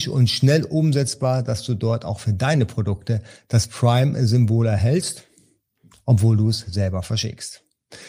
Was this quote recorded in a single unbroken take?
yes; 0 cuts

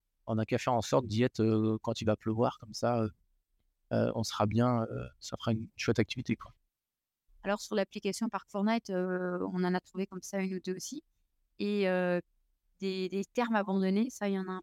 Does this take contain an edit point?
yes; 1 cut; at 7.3 s

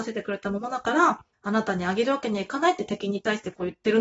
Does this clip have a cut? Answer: yes; 1 cut; at 1.3 s

